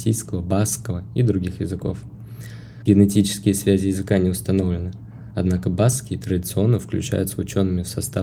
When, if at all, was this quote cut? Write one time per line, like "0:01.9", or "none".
0:02.8